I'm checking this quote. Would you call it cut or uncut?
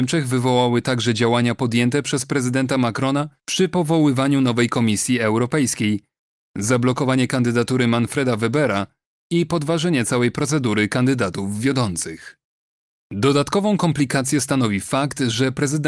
uncut